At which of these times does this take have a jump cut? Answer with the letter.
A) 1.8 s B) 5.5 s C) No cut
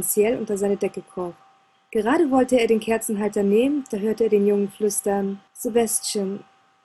B